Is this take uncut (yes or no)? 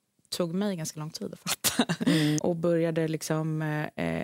no